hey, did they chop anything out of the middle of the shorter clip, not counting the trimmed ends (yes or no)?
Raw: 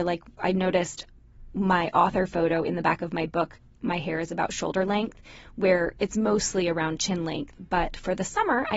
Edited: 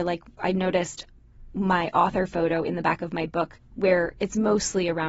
yes